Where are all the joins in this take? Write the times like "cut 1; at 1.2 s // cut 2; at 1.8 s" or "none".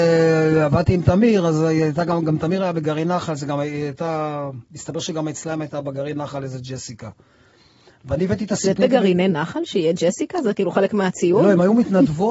cut 1; at 8.8 s